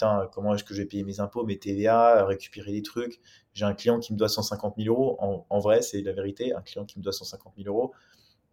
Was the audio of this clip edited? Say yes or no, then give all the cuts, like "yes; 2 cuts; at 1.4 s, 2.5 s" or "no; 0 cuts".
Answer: no; 0 cuts